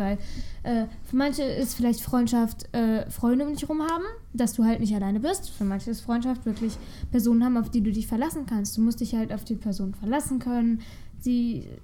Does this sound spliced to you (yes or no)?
no